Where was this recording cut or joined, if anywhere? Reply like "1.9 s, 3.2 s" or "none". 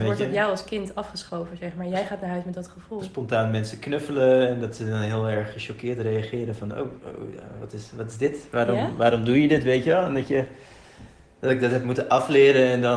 none